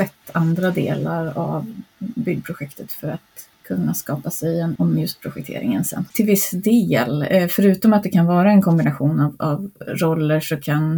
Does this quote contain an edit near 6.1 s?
yes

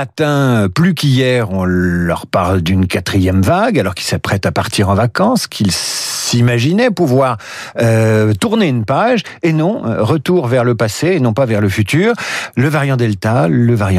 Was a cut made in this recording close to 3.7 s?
no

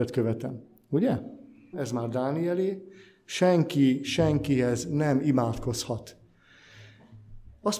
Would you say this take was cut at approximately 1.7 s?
yes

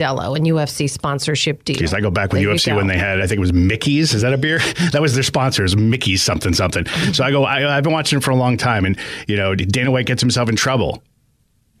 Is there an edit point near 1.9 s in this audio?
no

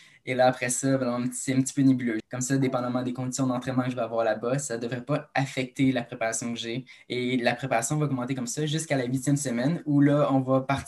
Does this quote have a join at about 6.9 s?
yes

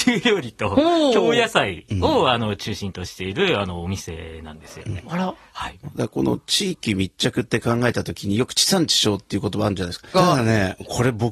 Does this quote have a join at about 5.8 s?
yes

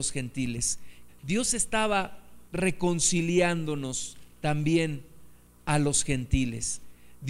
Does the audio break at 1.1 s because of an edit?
yes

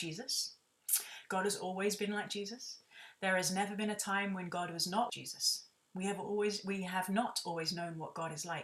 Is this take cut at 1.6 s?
no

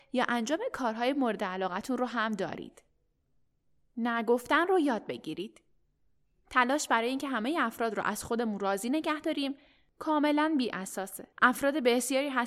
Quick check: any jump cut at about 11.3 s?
yes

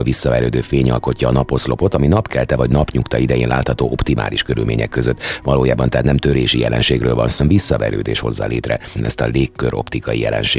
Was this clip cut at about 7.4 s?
yes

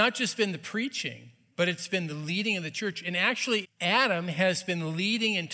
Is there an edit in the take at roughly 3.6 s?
yes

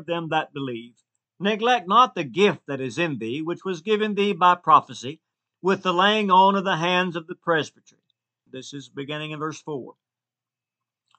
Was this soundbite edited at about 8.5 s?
yes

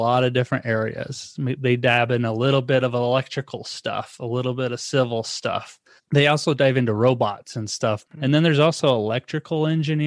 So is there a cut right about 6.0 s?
yes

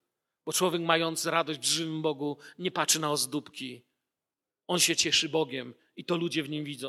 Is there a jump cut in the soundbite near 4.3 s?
no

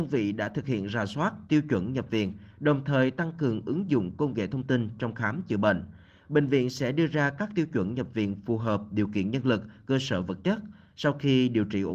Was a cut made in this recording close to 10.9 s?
no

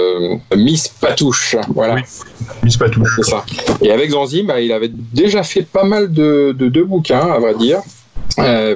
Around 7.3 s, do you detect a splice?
no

